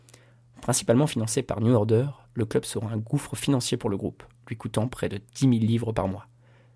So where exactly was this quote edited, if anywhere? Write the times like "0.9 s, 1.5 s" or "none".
none